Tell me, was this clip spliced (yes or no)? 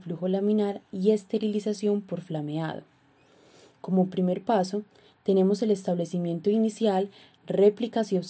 no